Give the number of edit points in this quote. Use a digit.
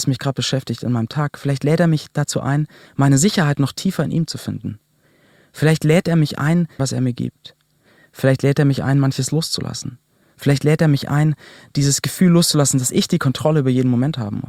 1